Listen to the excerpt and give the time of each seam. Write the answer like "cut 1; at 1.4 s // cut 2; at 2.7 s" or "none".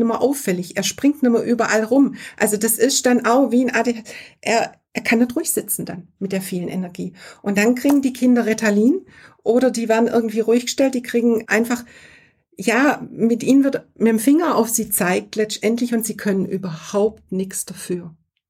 cut 1; at 11.5 s